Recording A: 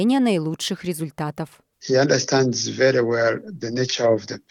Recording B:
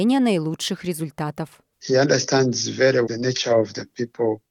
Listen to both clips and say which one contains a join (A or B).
B